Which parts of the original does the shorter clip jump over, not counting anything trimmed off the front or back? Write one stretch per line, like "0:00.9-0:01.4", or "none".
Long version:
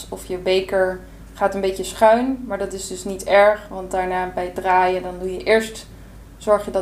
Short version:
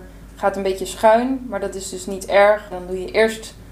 0:03.7-0:05.0